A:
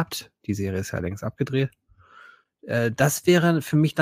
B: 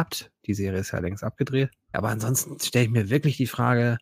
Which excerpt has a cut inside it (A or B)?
B